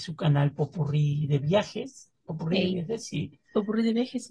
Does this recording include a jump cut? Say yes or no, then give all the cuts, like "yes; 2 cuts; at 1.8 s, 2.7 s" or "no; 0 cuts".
no; 0 cuts